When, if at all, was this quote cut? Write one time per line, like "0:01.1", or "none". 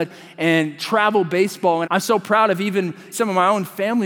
0:01.8
0:03.1